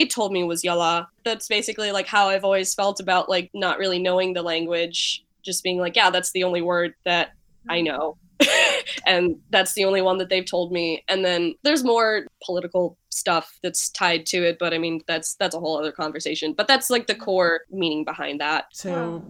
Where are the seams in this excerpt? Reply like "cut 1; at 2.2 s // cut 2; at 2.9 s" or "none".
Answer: none